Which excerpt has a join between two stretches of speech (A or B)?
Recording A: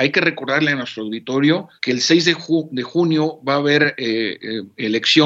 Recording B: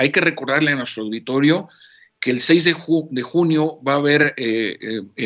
A